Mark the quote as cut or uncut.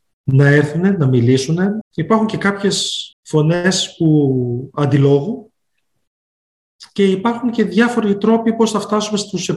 cut